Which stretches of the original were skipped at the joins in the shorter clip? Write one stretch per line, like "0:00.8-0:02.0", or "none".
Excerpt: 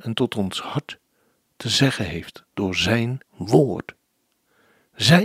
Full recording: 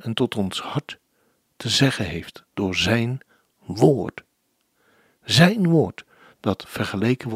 0:03.2-0:03.5

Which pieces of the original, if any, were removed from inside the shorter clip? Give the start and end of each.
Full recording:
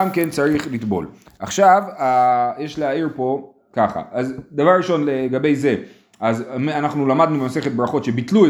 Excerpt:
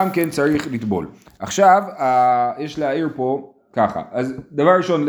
none

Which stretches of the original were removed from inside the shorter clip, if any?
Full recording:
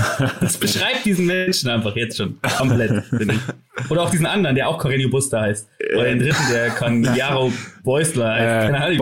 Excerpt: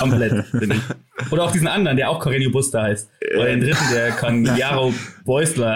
none

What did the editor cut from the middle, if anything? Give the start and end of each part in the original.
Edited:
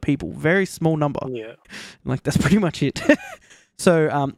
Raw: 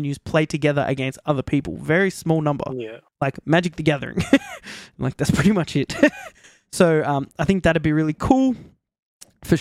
0:03.1-0:04.6

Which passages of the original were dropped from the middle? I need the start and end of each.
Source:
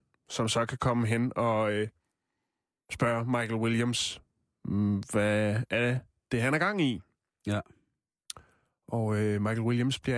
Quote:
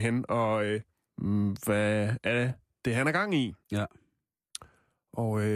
0:02.1-0:04.5
0:07.1-0:07.4

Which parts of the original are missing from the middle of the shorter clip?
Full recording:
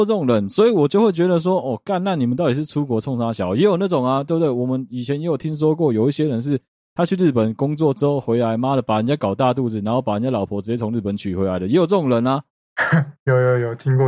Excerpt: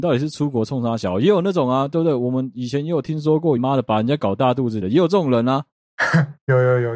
0:05.9-0:08.6
0:09.8-0:11.6

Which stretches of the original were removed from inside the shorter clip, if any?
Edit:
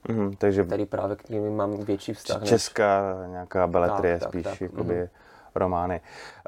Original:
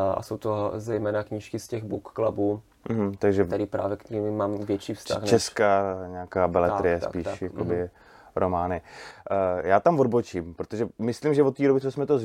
none

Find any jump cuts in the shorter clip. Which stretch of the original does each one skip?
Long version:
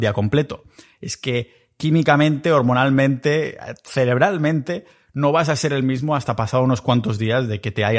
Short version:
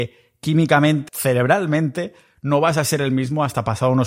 0:02.4-0:03.8

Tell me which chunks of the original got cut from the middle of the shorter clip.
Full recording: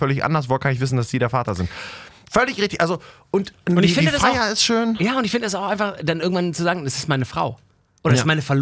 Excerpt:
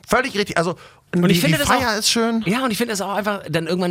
0:03.3-0:03.6

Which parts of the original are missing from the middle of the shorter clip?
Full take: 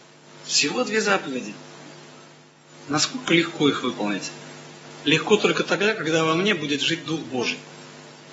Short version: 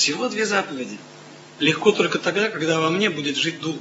0:02.1-0:05.0

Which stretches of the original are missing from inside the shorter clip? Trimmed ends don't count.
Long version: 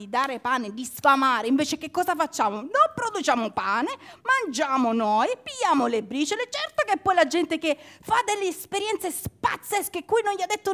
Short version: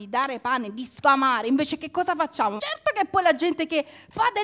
0:02.6-0:06.5

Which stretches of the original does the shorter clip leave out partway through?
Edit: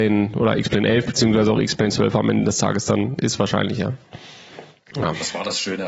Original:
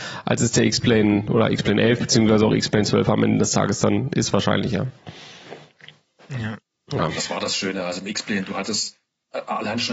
0:05.8-0:06.9

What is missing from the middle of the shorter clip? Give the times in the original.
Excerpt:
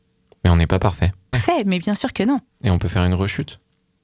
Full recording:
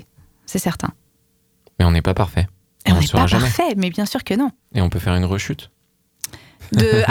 0:02.7-0:03.4

